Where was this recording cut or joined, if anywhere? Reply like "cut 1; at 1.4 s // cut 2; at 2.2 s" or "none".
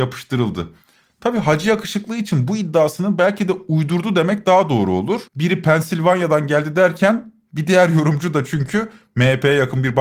cut 1; at 5.3 s